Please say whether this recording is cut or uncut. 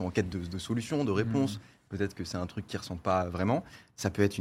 uncut